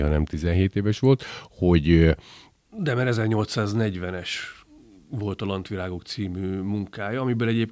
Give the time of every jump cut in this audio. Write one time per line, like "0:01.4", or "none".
none